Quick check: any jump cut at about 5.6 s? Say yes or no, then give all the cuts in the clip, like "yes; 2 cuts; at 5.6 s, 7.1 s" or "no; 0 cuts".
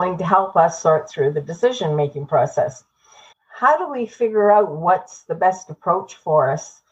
no; 1 cut; at 3.3 s